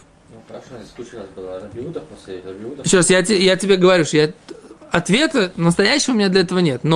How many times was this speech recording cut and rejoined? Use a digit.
0